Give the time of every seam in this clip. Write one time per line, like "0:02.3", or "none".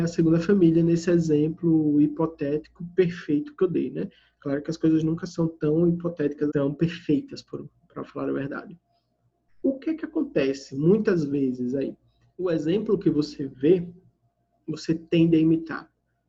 0:06.5